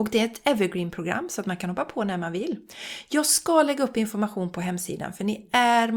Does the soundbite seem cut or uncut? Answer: uncut